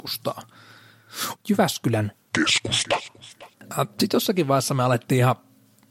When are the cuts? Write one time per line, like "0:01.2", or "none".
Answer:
0:01.3